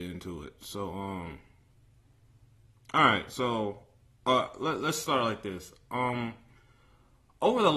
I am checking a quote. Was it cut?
no; 0 cuts

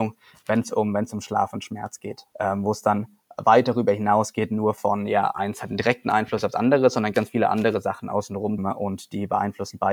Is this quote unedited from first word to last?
no; 3 cuts; at 2.3 s, 7.1 s, 8.6 s

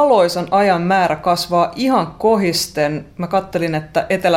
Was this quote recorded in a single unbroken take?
yes; 0 cuts

